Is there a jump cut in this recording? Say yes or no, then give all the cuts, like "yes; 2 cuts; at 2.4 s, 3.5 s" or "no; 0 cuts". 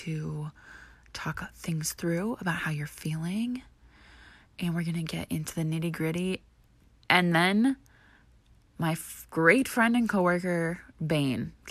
no; 0 cuts